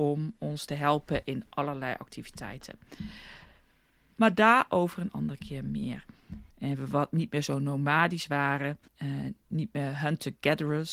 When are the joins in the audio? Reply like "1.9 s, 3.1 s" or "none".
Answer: 6.5 s, 8.9 s